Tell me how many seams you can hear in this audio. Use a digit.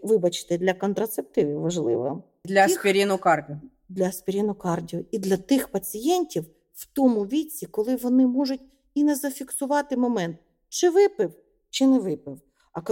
1